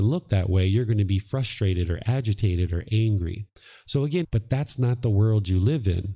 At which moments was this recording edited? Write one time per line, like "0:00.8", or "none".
0:04.2